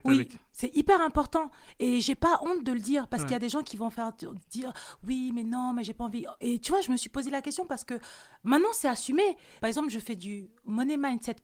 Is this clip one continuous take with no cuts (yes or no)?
no